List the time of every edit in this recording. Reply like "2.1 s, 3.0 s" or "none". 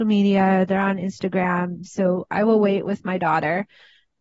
1.9 s